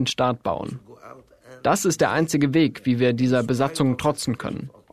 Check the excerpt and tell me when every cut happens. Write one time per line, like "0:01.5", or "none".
none